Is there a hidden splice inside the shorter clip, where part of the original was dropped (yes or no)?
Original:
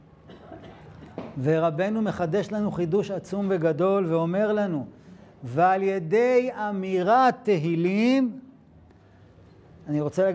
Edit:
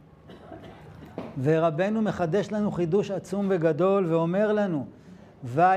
no